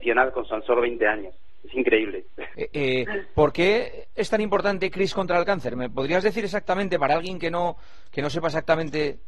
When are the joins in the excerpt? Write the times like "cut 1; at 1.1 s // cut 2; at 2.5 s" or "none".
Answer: cut 1; at 2.5 s